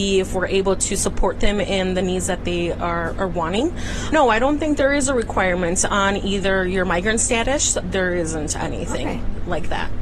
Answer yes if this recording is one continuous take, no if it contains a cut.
yes